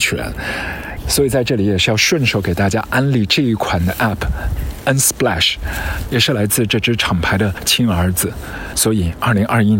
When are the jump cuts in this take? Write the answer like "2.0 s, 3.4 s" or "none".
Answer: 6.0 s